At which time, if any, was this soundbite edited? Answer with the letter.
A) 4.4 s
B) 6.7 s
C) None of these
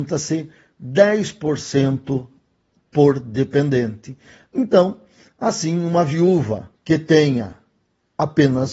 B